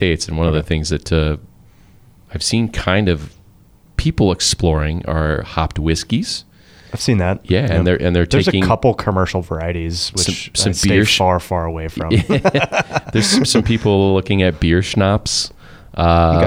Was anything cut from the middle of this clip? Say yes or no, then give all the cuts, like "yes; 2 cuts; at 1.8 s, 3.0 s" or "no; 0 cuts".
no; 0 cuts